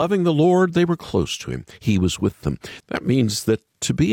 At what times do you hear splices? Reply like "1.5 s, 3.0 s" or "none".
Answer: 2.8 s